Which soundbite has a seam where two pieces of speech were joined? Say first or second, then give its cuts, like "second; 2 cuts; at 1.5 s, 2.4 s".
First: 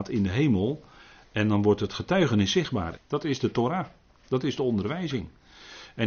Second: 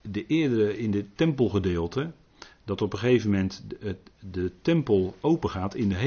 first; 1 cut; at 2.9 s